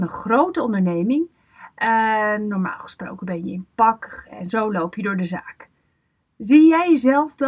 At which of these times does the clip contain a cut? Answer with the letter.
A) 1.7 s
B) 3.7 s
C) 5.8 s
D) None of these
D